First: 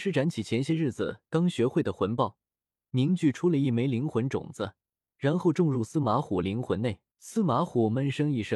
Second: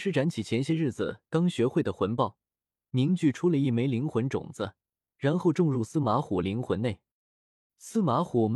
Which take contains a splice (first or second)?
first